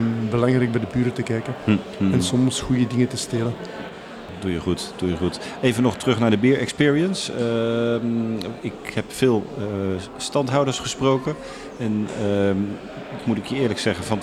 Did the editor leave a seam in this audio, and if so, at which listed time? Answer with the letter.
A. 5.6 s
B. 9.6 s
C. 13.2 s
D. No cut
C